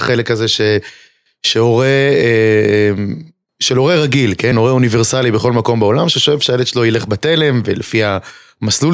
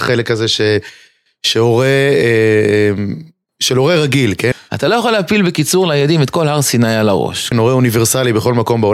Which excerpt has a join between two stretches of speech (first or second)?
second